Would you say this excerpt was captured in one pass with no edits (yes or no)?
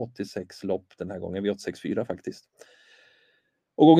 yes